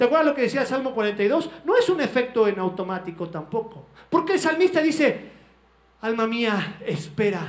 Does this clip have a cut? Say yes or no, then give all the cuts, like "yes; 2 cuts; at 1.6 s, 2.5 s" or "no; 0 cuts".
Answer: no; 0 cuts